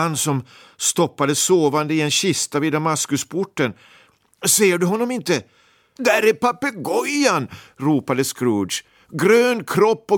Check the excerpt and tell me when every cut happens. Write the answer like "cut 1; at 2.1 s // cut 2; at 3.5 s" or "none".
cut 1; at 6.0 s